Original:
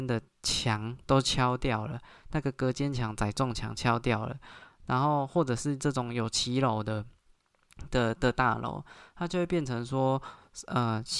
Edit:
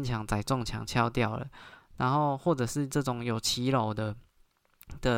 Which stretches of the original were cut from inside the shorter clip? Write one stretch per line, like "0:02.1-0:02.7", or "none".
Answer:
none